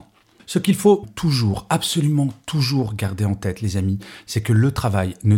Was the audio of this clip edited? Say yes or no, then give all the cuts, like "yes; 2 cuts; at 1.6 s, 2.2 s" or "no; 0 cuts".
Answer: yes; 1 cut; at 1.0 s